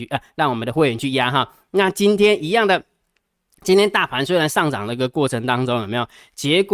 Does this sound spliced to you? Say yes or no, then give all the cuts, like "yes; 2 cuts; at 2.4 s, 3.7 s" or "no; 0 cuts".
no; 0 cuts